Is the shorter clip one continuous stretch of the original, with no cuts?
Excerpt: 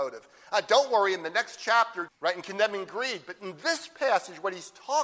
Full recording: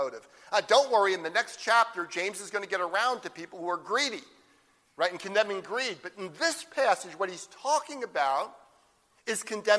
no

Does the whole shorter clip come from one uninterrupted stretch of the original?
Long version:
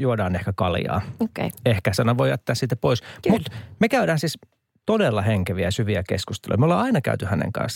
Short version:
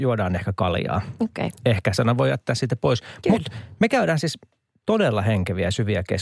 yes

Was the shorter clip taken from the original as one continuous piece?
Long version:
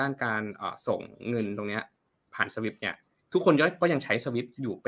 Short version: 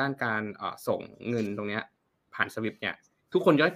yes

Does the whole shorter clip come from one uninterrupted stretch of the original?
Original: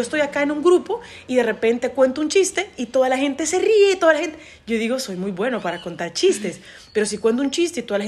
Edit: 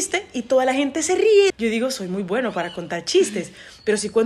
no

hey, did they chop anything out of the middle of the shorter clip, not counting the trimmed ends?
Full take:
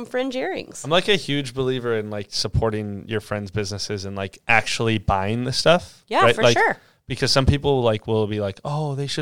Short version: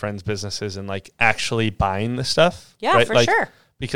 no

